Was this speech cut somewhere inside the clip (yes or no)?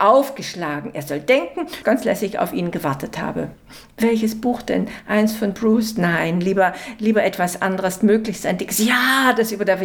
yes